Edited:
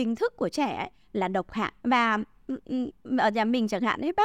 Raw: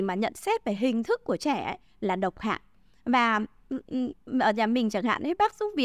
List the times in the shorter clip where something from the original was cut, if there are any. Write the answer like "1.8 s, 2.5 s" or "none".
1.8 s